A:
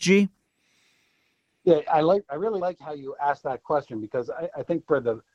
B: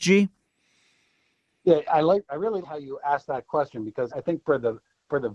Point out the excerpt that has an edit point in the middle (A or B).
B